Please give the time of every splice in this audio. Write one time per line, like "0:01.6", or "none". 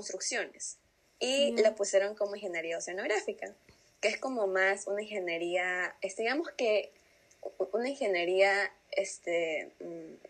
0:01.0